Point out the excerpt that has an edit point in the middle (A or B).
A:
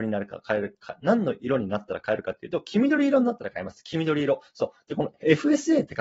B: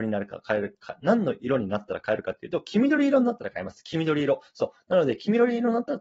A